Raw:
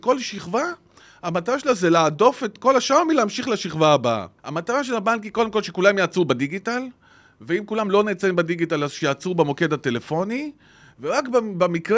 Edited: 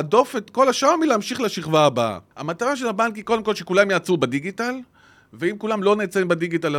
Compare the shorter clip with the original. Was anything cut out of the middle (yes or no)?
no